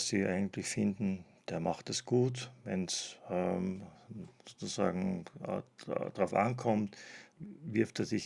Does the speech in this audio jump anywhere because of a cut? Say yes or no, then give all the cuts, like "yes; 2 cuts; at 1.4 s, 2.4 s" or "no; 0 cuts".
yes; 1 cut; at 7.3 s